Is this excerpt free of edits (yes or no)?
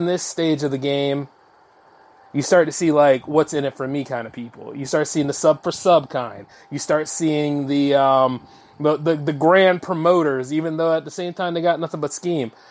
yes